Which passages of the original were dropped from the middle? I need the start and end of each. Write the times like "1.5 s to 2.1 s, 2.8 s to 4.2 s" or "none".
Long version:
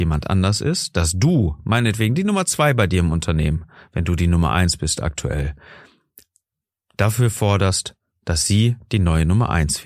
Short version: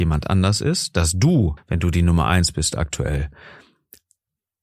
1.6 s to 3.8 s